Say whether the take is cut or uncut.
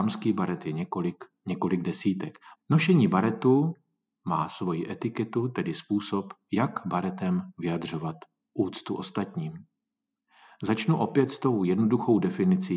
cut